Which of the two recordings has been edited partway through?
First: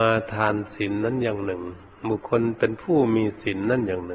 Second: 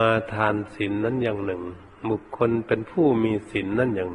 first; 1 cut; at 2.2 s

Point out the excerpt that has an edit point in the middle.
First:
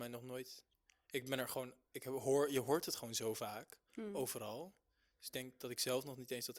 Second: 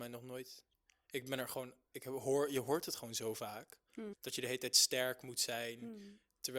second; 1 cut; at 4.1 s

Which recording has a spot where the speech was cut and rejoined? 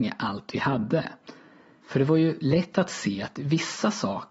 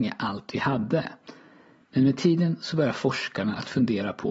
first; 1 cut; at 1.8 s

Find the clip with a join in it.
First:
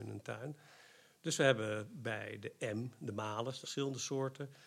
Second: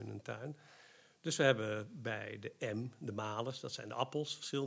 first; 1 cut; at 3.6 s

